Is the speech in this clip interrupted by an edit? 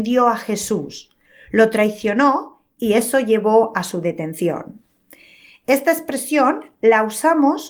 no; 0 cuts

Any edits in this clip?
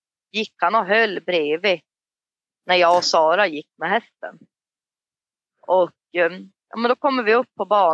no; 0 cuts

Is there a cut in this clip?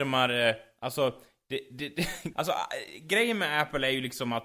yes; 1 cut; at 2.3 s

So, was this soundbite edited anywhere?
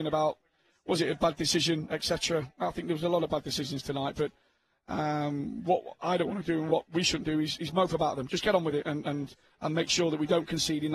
no; 0 cuts

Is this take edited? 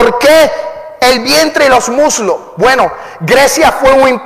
no; 0 cuts

